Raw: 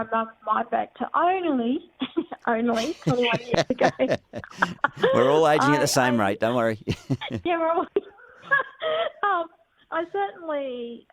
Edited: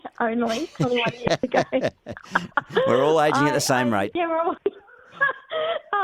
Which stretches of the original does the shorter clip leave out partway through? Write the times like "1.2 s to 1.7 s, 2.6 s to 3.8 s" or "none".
6.4 s to 7.4 s